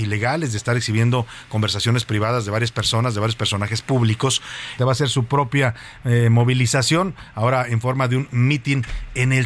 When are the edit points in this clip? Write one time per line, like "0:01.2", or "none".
0:04.8